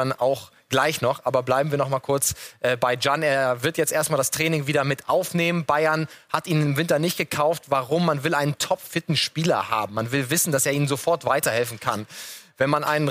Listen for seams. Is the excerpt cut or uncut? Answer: uncut